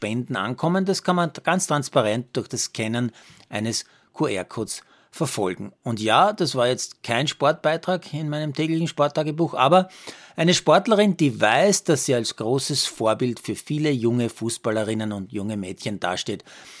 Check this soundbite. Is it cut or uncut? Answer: uncut